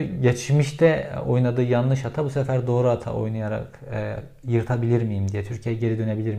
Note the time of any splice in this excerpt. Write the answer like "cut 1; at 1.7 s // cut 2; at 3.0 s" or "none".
none